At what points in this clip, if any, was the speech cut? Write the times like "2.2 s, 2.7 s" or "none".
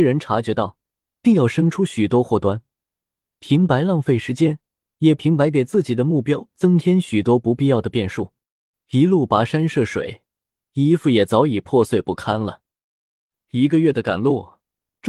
8.7 s